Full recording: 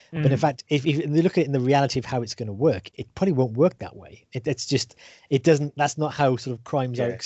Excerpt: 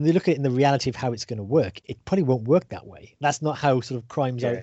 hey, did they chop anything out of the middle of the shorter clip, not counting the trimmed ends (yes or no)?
yes